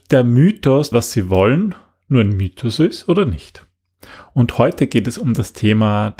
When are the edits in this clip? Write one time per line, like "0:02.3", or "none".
0:00.9